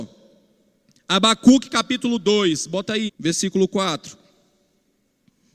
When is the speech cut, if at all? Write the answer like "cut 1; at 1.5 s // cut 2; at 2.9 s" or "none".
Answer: cut 1; at 3.1 s